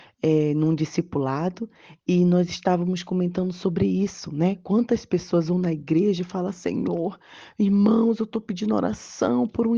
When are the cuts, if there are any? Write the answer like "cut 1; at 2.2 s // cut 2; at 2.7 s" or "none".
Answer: none